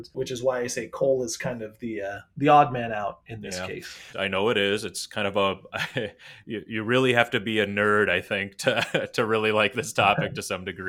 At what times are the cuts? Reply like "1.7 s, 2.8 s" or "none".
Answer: 4.1 s

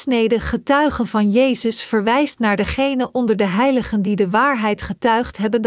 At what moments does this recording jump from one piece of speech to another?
none

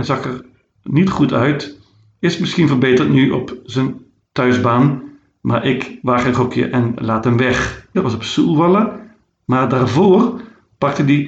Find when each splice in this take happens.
7.9 s

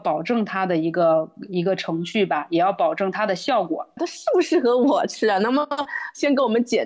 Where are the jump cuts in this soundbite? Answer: 4.0 s

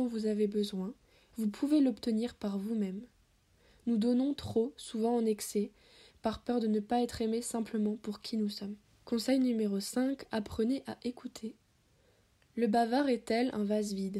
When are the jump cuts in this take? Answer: 6.1 s

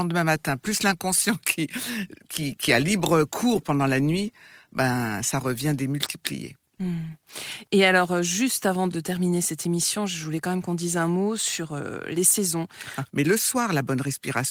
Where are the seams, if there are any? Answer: 8.9 s, 13.1 s

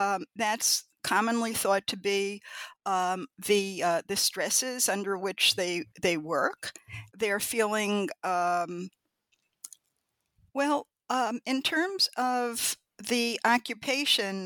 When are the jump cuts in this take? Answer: 7.1 s, 10.5 s

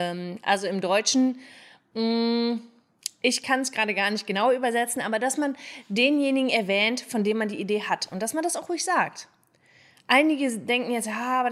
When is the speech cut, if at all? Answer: none

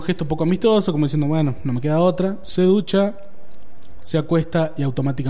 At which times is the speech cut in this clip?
none

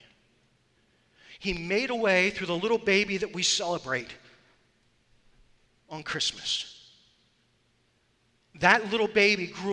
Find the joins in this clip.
none

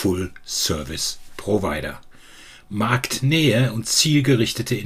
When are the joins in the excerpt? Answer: none

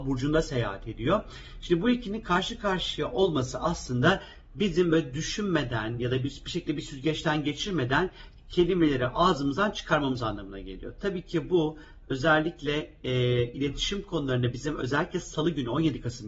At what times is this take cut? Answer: none

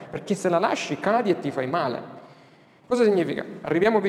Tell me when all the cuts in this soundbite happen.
2.8 s

